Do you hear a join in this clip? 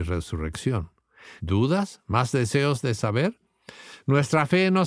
yes; 1 cut; at 1.4 s

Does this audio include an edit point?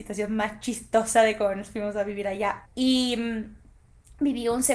yes; 1 cut; at 2.6 s

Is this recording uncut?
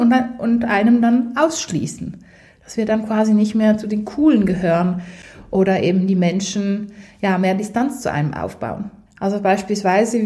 no; 1 cut; at 9.1 s

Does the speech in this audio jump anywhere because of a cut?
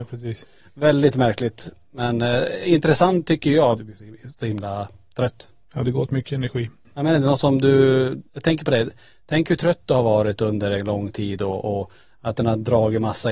yes; 2 cuts; at 3.8 s, 6.9 s

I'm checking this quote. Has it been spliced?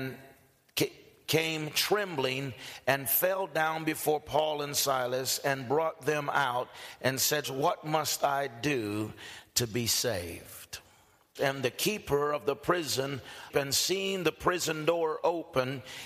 yes; 3 cuts; at 7.4 s, 11.4 s, 13.5 s

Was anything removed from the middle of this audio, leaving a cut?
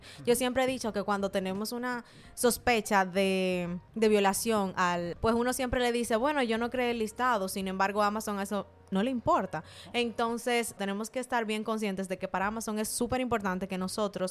yes; 2 cuts; at 5.1 s, 10.8 s

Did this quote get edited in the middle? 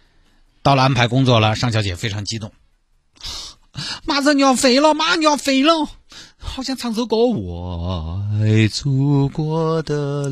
no; 0 cuts

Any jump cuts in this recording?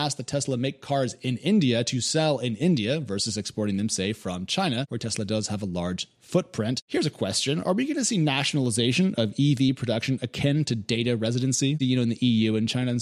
yes; 1 cut; at 11.8 s

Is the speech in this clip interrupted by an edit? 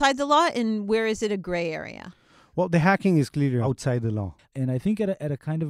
yes; 1 cut; at 4.4 s

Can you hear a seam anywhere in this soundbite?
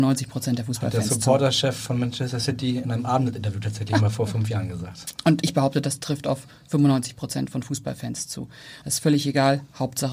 yes; 2 cuts; at 5.4 s, 8.8 s

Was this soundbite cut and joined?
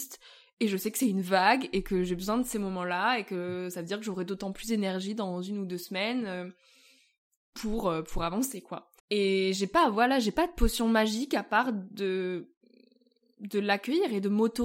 yes; 1 cut; at 9.0 s

